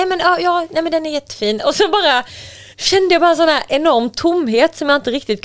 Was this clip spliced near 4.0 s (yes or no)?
no